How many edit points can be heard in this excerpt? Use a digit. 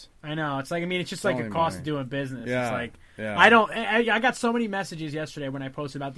0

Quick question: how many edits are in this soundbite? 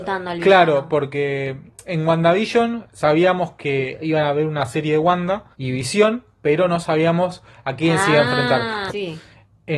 2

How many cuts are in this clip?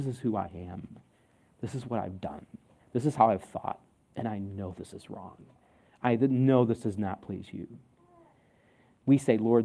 0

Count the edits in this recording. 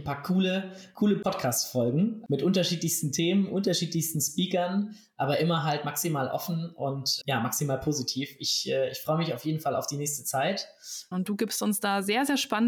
2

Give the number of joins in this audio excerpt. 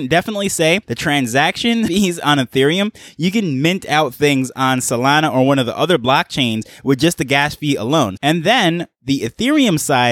1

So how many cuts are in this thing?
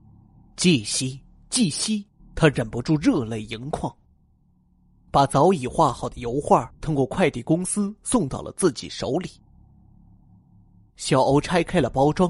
3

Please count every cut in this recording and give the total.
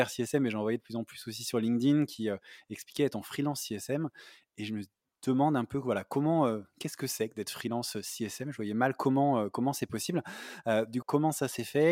1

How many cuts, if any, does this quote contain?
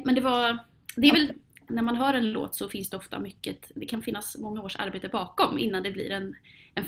1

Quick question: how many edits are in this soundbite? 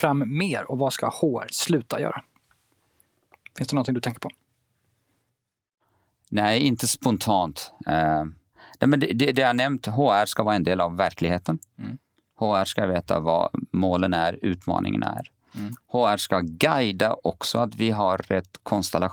0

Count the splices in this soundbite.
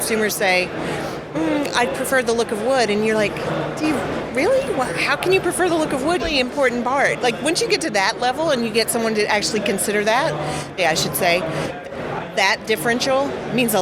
3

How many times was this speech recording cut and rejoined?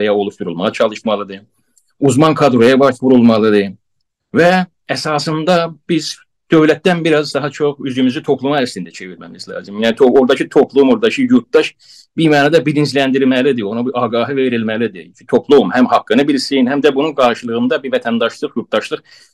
0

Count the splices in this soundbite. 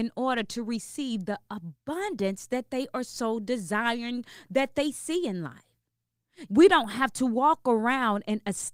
1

